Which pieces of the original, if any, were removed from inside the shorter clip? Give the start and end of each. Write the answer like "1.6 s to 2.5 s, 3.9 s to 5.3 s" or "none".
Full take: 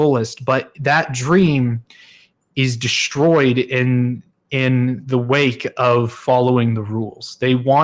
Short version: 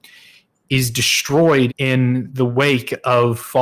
3.5 s to 4.4 s